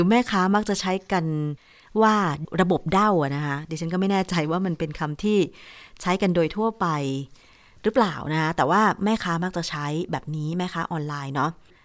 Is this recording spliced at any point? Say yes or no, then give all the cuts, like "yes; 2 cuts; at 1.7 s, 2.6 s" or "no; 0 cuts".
no; 0 cuts